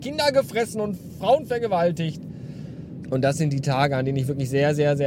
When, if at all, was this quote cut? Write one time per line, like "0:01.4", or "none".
0:03.0